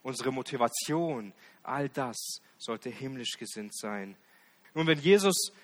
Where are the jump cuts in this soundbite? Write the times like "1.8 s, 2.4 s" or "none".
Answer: 4.6 s